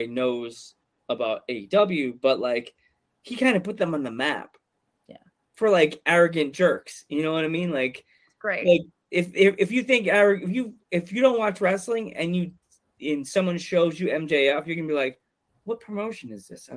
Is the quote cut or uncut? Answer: uncut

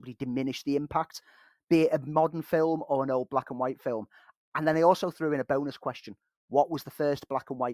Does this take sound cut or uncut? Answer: uncut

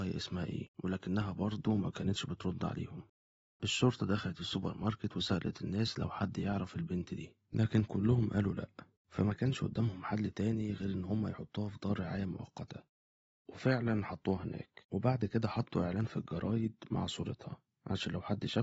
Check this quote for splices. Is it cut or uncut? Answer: uncut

